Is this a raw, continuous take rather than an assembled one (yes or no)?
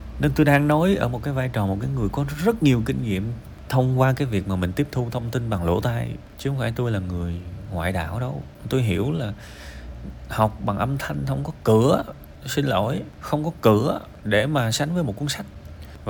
no